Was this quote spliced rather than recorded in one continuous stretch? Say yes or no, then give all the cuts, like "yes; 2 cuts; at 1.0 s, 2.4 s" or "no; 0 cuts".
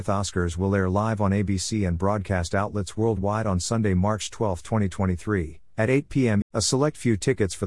yes; 1 cut; at 6.4 s